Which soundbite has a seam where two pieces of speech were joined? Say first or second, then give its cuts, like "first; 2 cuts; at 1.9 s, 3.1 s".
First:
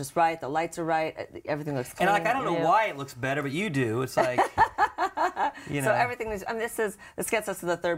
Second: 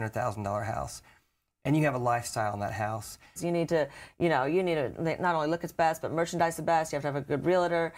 second; 1 cut; at 3.4 s